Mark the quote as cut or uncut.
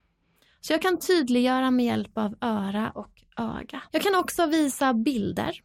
cut